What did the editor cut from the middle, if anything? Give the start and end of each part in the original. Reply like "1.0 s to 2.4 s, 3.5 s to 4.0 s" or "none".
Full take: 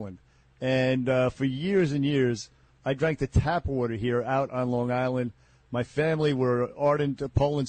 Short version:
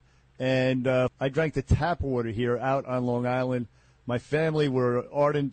1.3 s to 2.7 s